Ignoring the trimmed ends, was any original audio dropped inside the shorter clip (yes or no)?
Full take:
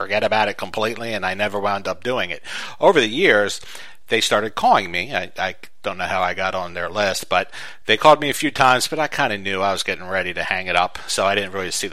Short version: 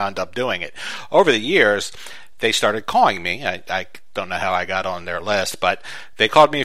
no